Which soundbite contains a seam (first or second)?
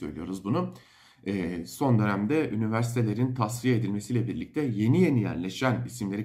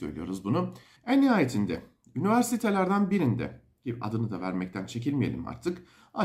second